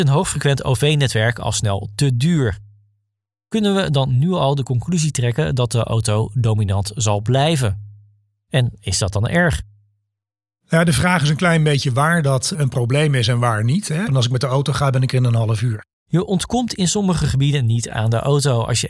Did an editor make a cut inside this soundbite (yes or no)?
yes